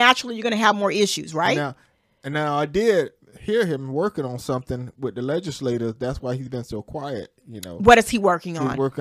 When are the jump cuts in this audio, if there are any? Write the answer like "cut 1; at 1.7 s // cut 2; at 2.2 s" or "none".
none